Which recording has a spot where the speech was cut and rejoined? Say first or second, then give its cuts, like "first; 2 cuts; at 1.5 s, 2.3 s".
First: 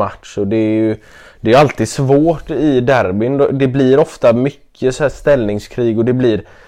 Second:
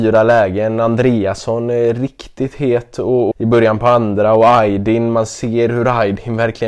second; 1 cut; at 3.3 s